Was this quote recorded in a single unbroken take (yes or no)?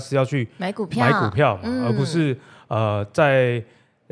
yes